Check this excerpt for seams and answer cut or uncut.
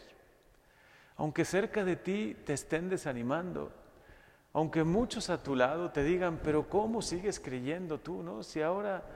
uncut